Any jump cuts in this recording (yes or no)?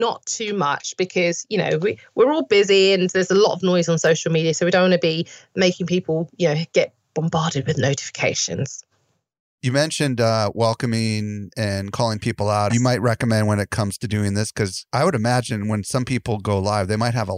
yes